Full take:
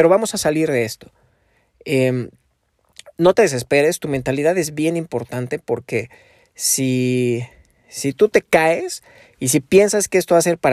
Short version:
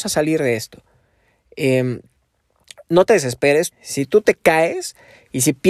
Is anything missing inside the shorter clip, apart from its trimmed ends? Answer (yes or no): yes